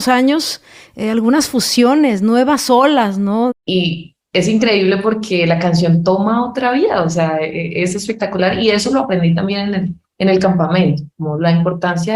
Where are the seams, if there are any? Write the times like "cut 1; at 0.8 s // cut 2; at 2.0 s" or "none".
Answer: cut 1; at 3.5 s

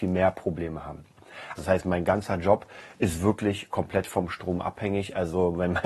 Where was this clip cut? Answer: cut 1; at 1.6 s

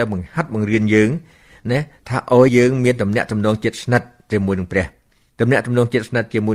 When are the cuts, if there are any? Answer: cut 1; at 2.5 s

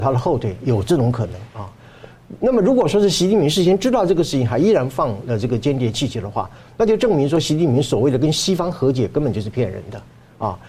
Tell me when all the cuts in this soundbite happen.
none

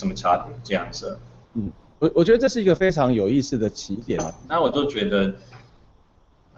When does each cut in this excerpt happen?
cut 1; at 4.5 s

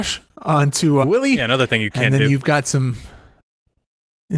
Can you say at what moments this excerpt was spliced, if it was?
cut 1; at 1.0 s

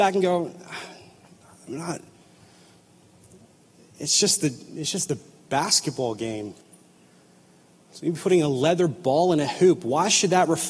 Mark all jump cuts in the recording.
none

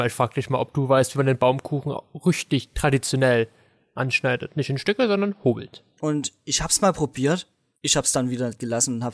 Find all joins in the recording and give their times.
none

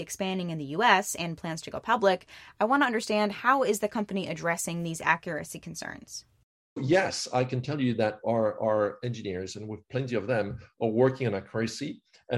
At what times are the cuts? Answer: none

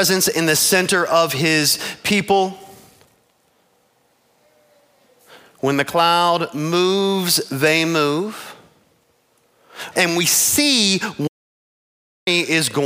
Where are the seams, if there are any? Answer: cut 1; at 9.9 s

